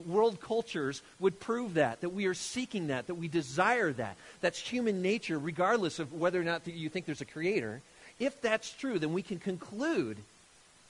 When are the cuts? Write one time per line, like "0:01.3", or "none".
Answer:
none